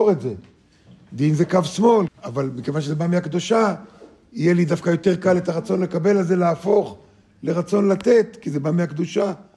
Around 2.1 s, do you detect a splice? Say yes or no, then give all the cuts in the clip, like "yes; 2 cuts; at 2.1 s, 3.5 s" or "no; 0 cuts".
yes; 1 cut; at 2.1 s